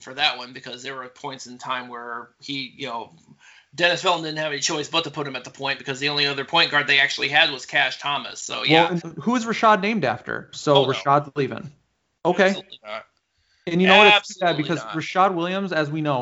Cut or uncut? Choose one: cut